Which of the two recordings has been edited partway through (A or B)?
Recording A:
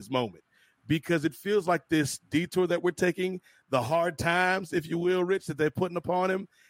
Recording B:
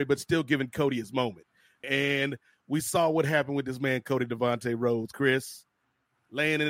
B